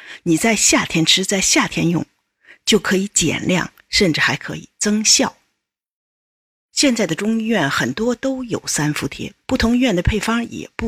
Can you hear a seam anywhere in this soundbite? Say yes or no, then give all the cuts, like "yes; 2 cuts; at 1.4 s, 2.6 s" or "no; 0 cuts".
no; 0 cuts